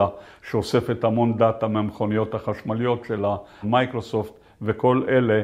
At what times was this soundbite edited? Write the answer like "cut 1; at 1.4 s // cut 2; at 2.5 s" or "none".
cut 1; at 3.6 s